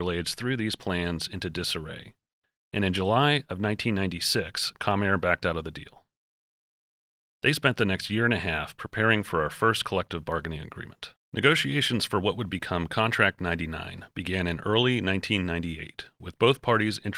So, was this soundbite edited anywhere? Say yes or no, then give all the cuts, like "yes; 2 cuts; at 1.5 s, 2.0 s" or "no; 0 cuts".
yes; 2 cuts; at 7.3 s, 11.2 s